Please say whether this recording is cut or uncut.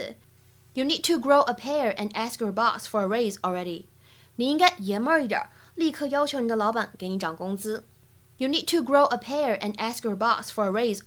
uncut